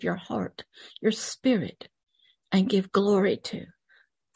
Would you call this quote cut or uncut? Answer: uncut